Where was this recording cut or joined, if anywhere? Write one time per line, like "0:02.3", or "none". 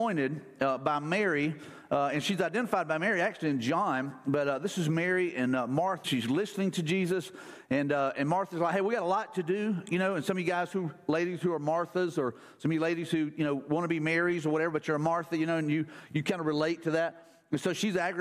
0:06.0